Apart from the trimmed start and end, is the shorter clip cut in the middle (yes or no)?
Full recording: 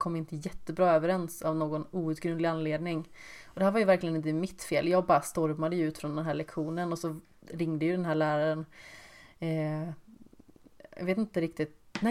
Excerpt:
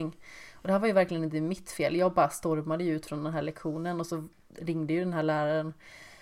no